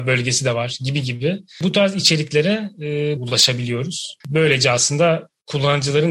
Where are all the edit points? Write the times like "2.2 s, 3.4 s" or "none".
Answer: 3.2 s, 4.2 s